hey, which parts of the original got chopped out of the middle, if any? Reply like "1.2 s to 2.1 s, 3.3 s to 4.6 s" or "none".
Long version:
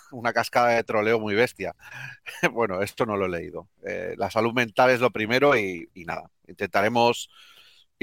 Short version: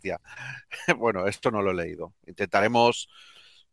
3.7 s to 6.4 s